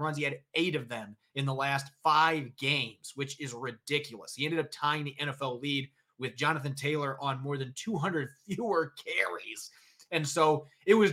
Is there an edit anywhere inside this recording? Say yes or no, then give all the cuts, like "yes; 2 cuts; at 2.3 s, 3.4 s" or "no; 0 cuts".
no; 0 cuts